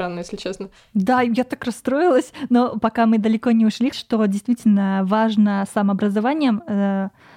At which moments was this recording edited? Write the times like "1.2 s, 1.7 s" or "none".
3.9 s